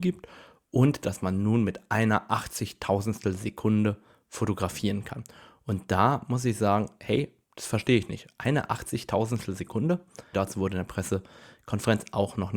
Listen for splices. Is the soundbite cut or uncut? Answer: cut